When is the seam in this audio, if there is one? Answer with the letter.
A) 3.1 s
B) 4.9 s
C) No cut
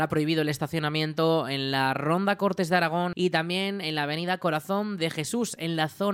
A